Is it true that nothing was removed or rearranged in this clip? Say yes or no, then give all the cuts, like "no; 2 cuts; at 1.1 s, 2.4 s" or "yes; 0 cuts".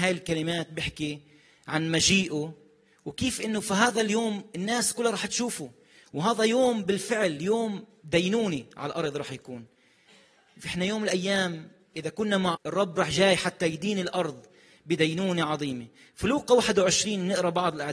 no; 1 cut; at 12.5 s